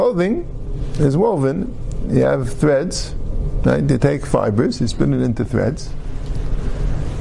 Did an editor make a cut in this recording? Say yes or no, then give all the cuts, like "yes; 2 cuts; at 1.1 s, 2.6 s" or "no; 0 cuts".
no; 0 cuts